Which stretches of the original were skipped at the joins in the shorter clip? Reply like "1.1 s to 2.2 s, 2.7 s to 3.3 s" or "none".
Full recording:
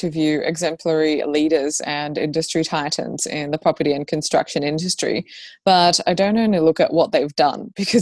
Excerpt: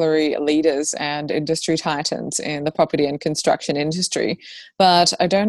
none